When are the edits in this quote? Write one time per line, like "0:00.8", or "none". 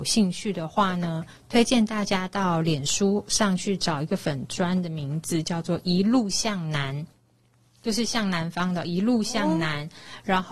none